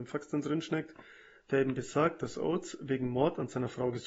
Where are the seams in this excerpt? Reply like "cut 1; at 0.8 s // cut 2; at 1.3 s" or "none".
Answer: none